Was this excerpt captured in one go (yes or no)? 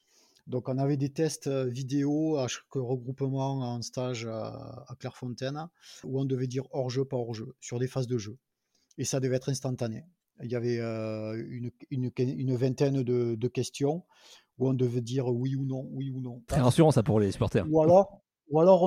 no